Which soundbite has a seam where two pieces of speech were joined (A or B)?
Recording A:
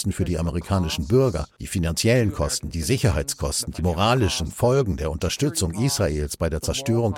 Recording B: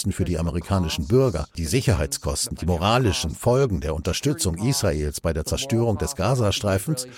B